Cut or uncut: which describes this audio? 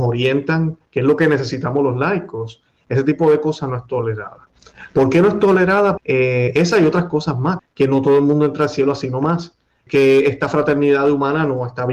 cut